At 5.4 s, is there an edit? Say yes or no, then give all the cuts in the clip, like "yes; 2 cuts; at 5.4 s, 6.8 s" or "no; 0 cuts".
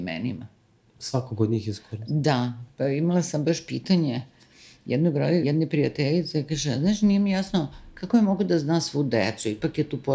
yes; 1 cut; at 5.4 s